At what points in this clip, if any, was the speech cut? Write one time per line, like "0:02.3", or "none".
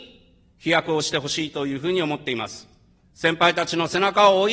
0:03.0

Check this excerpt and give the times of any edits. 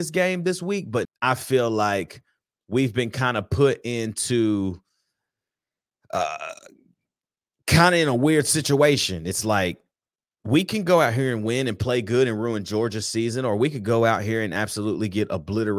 0:01.1

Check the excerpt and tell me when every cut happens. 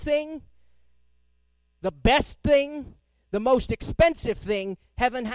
none

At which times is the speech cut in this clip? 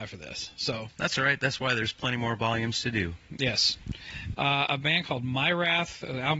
0:04.3

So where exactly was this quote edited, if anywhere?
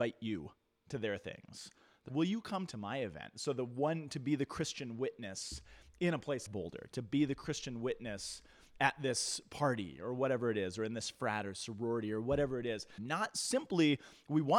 0:02.1
0:06.5
0:13.0

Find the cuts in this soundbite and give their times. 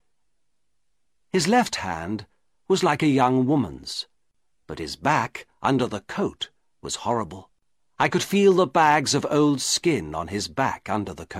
none

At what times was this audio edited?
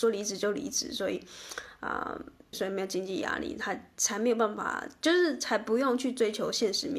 0:02.5

